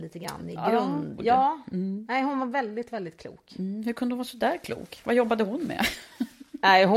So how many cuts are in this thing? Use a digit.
1